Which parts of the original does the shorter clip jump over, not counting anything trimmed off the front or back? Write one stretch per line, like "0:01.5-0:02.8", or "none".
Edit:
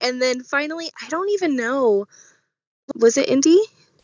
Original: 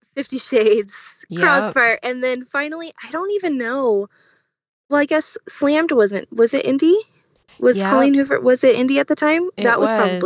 0:04.9-0:06.3